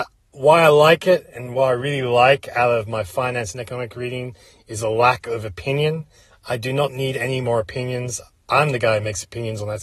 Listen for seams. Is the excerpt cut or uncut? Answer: uncut